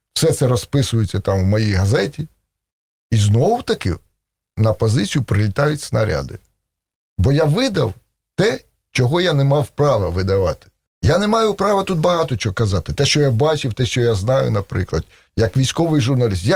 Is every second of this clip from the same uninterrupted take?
yes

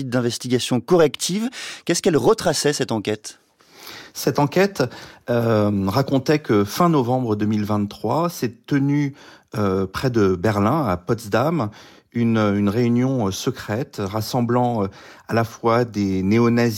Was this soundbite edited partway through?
no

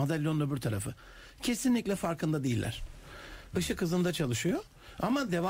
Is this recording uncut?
no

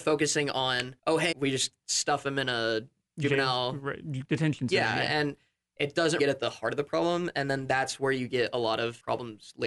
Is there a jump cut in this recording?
yes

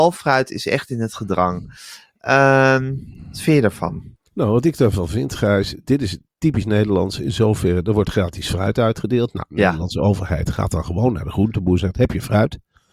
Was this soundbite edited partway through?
yes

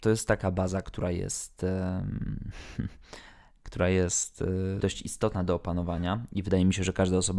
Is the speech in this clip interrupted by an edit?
yes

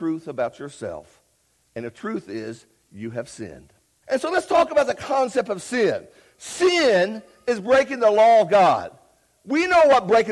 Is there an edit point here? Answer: yes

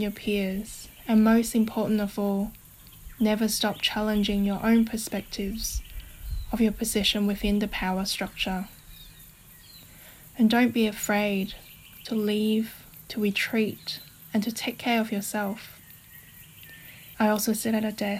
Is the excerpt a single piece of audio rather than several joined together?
no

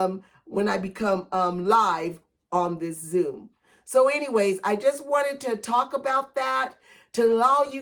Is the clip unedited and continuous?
yes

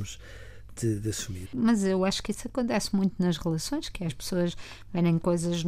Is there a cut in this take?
yes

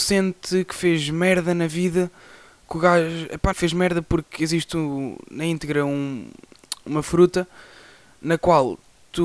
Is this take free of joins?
no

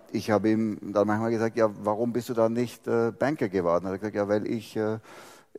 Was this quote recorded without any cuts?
yes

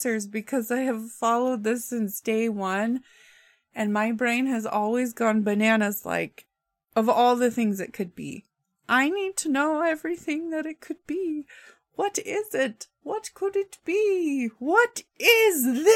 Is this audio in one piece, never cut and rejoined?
yes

